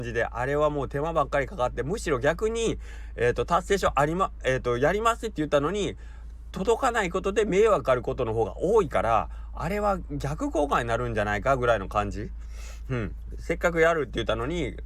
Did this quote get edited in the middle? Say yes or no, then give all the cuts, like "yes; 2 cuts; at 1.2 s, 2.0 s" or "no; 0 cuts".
yes; 1 cut; at 7.8 s